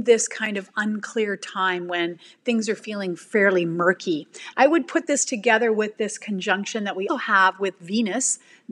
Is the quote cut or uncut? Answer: cut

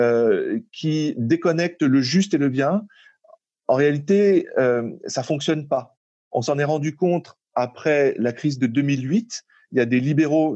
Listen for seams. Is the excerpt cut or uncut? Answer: uncut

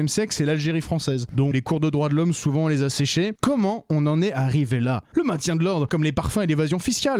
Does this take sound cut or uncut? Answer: cut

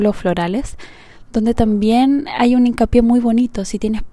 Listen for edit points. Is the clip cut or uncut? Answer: uncut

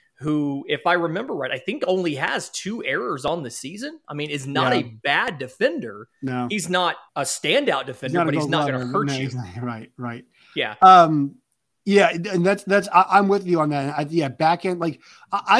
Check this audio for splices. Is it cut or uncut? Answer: cut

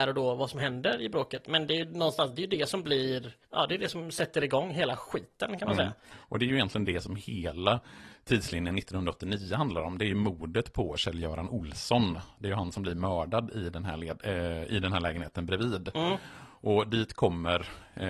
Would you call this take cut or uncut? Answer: cut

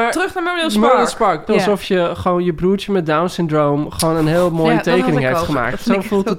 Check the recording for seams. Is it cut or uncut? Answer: cut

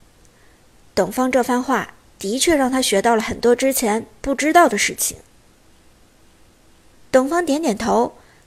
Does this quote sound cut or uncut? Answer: uncut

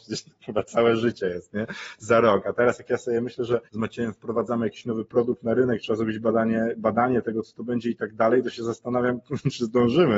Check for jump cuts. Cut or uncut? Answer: cut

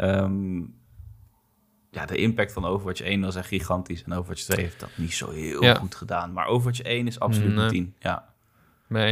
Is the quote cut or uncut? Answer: uncut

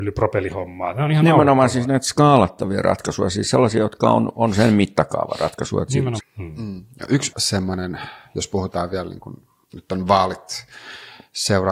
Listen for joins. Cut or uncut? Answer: cut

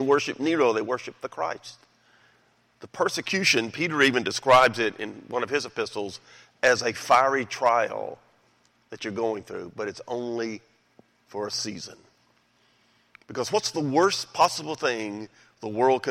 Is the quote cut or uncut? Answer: uncut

